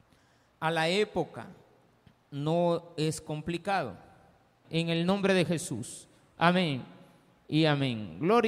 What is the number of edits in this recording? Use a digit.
1